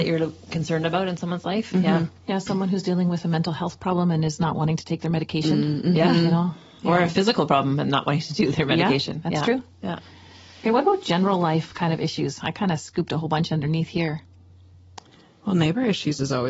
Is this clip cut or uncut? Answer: uncut